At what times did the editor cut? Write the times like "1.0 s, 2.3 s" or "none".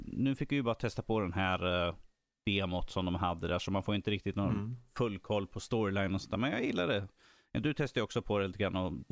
none